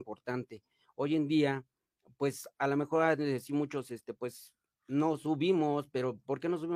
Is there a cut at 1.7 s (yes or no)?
no